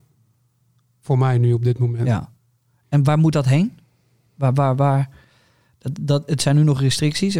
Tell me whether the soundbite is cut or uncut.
uncut